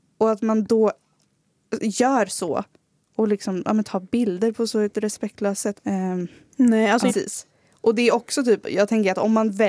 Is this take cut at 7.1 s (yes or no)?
yes